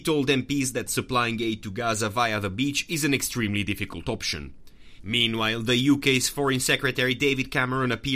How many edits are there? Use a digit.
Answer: 1